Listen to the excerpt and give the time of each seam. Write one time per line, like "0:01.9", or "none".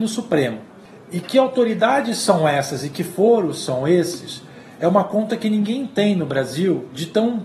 0:01.2

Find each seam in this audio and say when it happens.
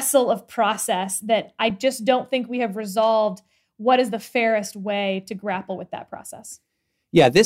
none

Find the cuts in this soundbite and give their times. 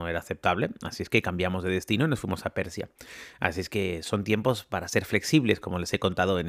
none

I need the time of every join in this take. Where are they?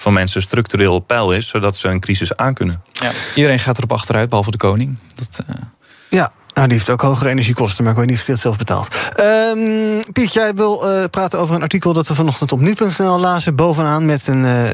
none

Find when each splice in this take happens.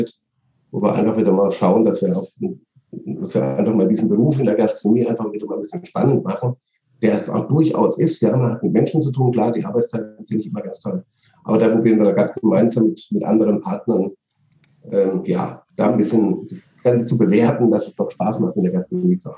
none

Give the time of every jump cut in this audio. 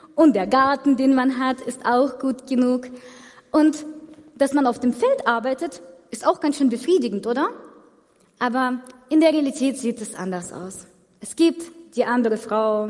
none

